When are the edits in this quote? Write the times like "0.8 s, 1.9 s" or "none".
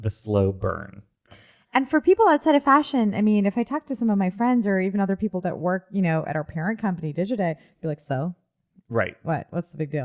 1.3 s

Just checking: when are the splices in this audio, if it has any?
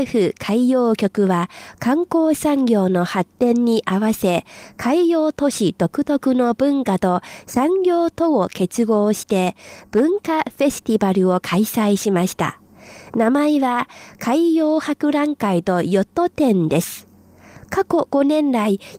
none

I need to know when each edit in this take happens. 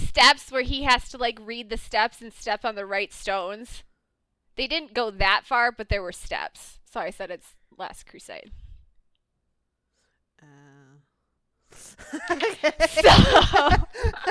none

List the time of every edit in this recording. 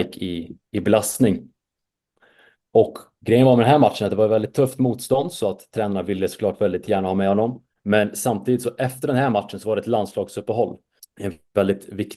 7.7 s, 11.0 s

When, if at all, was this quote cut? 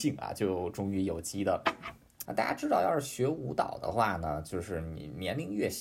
2.2 s

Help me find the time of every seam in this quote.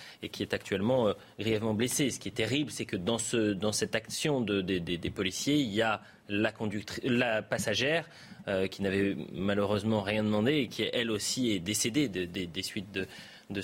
none

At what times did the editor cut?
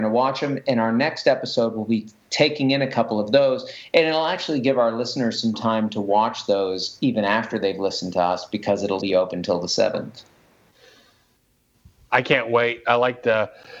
9.0 s

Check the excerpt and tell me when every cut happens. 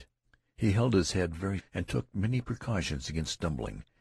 1.6 s

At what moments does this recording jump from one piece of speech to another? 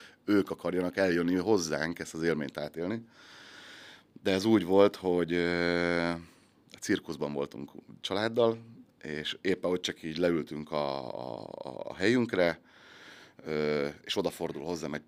none

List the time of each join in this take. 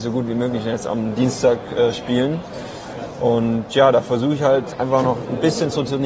none

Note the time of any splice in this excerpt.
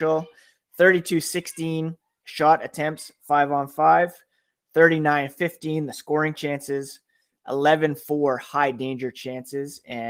none

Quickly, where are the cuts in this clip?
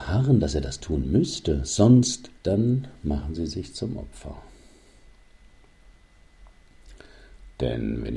2.4 s

